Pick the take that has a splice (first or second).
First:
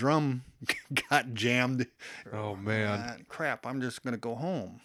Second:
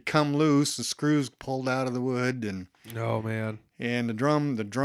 first